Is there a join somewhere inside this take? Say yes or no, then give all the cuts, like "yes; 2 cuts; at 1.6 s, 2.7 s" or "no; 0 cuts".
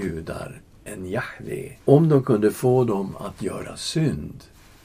yes; 1 cut; at 1.8 s